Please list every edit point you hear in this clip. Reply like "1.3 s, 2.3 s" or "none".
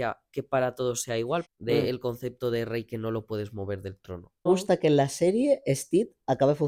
1.4 s, 4.5 s